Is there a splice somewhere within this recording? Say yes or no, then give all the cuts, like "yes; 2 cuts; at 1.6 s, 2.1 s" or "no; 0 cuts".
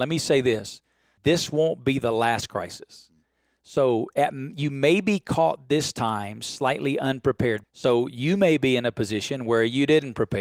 yes; 2 cuts; at 1.2 s, 7.6 s